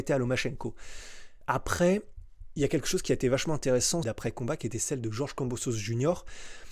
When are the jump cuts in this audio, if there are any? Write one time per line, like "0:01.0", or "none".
0:04.0